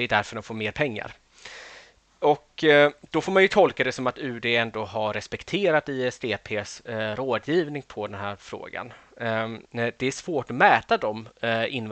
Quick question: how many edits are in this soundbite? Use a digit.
1